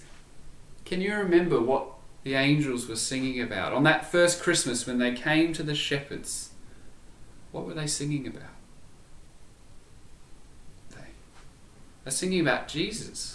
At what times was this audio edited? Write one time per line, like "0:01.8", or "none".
0:10.9